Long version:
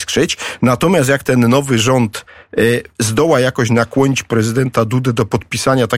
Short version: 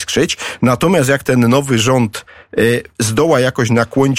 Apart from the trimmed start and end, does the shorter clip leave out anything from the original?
no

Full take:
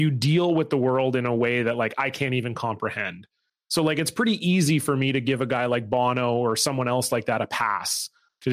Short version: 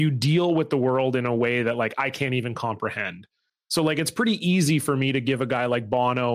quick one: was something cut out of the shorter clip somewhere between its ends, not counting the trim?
no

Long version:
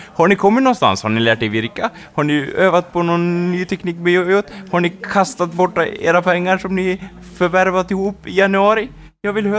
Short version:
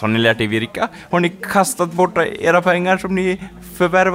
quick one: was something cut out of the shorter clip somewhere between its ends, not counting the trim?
yes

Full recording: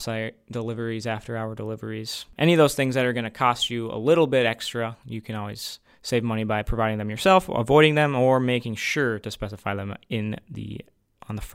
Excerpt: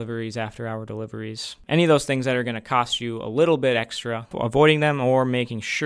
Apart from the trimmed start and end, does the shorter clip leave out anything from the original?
yes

